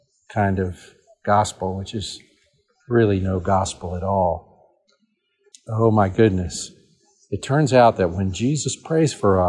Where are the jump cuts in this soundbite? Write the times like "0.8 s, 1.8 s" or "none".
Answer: 5.5 s